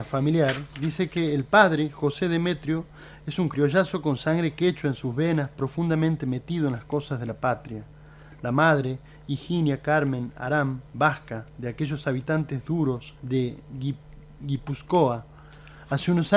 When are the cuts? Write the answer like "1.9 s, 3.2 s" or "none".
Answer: 13.2 s